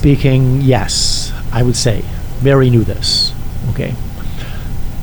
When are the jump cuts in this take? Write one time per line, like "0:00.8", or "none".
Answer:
none